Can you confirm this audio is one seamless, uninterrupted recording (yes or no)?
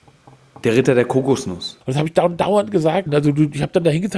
no